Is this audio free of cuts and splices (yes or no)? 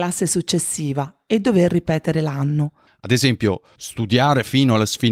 no